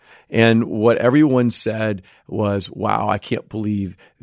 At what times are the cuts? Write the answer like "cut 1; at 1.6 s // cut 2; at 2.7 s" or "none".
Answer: none